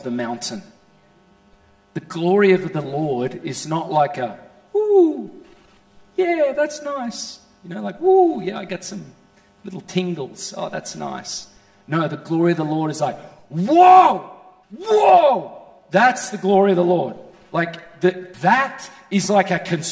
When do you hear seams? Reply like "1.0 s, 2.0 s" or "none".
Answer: 14.6 s, 18.3 s